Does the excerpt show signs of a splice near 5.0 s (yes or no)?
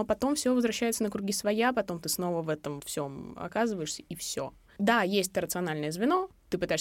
no